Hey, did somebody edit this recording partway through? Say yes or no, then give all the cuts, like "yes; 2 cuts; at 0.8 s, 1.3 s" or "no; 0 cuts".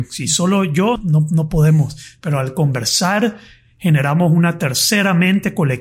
yes; 1 cut; at 1.0 s